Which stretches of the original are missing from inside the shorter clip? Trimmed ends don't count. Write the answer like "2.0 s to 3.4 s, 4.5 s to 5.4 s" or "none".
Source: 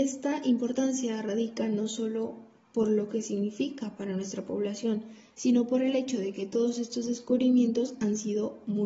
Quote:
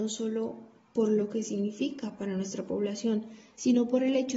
none